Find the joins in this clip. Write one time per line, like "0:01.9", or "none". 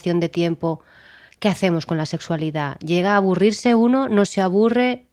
none